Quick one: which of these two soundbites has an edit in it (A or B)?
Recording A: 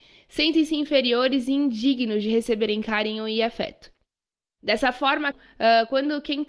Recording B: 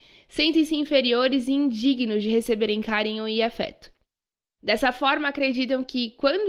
A